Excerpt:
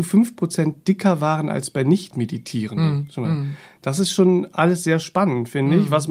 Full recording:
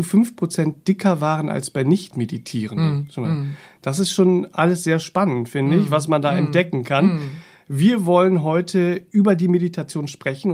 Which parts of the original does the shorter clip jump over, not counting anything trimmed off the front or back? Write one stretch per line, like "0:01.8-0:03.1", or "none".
none